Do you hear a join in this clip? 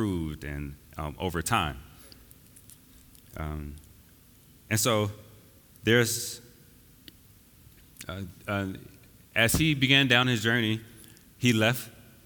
no; 0 cuts

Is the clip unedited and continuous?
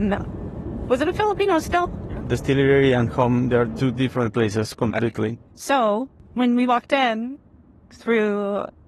no; 2 cuts; at 2.2 s, 5.5 s

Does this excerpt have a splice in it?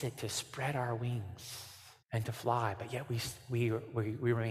yes; 1 cut; at 2.0 s

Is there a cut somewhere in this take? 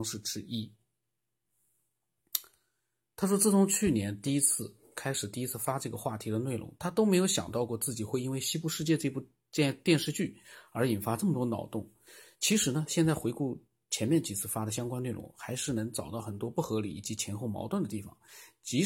no; 0 cuts

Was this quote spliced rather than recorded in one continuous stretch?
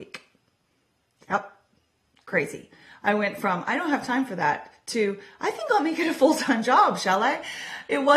no; 0 cuts

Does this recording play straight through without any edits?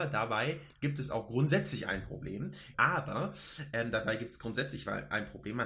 no; 1 cut; at 2.7 s

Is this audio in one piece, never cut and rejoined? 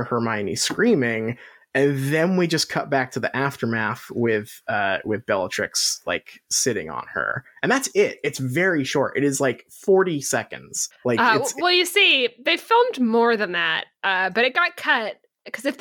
yes; 0 cuts

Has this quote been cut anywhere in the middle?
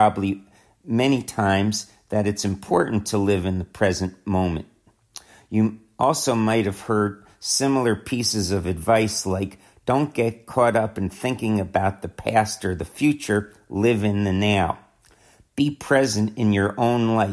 no; 0 cuts

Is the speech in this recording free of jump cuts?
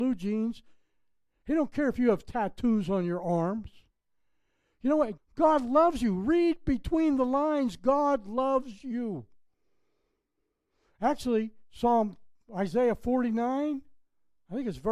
no; 1 cut; at 5.2 s

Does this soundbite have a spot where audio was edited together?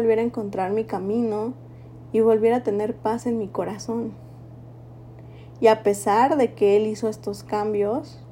no; 0 cuts

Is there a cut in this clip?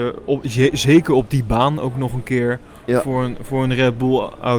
no; 0 cuts

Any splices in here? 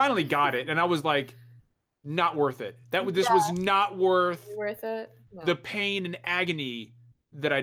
no; 0 cuts

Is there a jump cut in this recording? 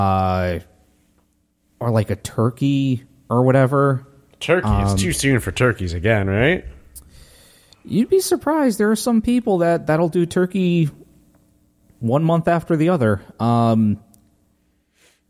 no; 0 cuts

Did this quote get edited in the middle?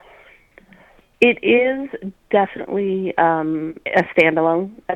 yes; 1 cut; at 3.8 s

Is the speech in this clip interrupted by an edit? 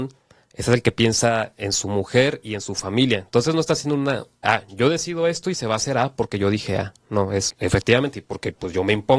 yes; 2 cuts; at 4.4 s, 7.5 s

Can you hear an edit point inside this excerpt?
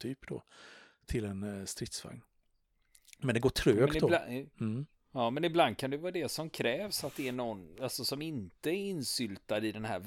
no; 0 cuts

